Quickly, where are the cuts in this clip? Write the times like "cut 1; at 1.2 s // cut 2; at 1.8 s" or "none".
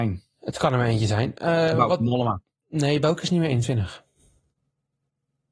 none